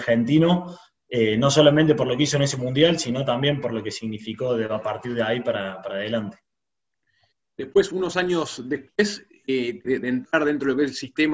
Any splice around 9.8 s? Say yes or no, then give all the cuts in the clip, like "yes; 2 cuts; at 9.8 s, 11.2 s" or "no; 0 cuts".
yes; 1 cut; at 9.8 s